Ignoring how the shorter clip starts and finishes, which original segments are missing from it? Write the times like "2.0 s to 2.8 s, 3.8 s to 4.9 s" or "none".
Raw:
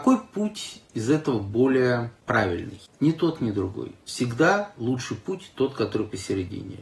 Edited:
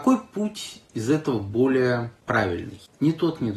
none